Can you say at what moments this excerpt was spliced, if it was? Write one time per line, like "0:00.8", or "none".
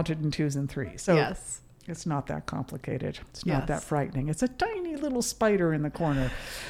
0:01.1